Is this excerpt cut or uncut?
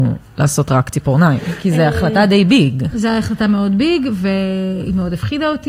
uncut